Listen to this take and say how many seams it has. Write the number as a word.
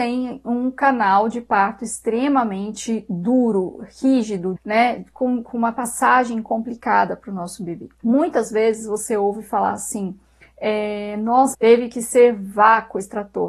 three